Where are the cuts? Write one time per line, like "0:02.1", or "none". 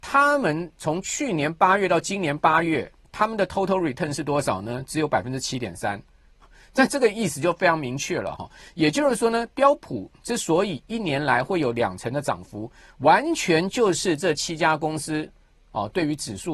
none